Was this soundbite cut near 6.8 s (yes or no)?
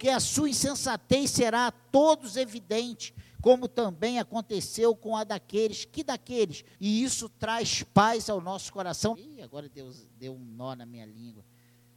yes